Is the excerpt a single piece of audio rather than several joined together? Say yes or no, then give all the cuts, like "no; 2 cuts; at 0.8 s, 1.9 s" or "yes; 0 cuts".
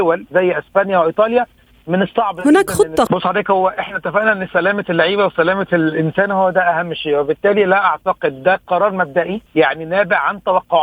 no; 2 cuts; at 3.1 s, 9.5 s